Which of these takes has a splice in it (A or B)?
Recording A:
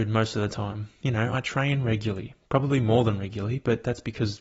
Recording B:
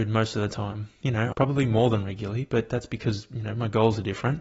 B